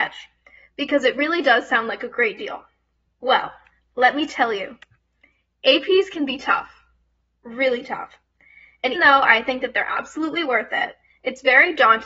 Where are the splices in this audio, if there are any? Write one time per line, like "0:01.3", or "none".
0:08.9